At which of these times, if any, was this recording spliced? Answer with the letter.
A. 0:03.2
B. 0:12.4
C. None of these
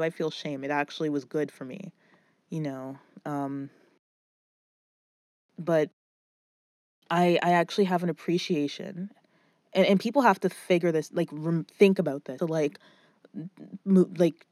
B